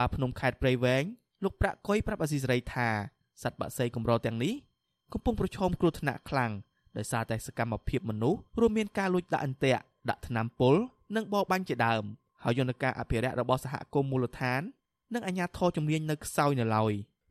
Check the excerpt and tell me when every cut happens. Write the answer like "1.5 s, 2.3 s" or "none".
8.5 s